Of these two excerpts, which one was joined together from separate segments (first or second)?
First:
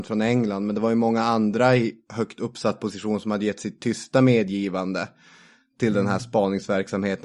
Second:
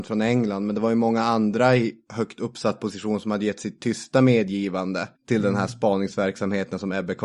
second